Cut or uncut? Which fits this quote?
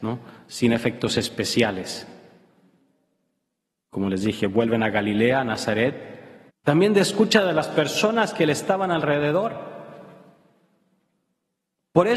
cut